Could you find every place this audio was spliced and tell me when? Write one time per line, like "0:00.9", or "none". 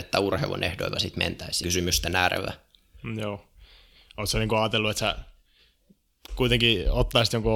0:01.6